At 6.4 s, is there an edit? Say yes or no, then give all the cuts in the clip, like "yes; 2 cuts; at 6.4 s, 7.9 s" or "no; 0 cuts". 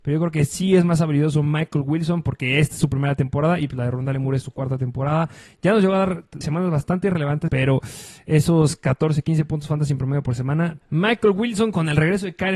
yes; 3 cuts; at 6.4 s, 7.5 s, 10.8 s